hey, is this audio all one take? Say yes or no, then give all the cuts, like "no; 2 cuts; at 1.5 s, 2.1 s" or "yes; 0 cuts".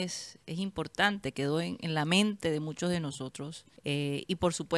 no; 1 cut; at 3.8 s